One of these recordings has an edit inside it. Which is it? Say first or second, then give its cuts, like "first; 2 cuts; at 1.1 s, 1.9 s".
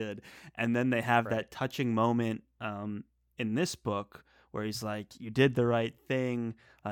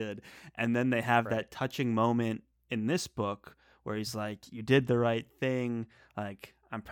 second; 1 cut; at 2.5 s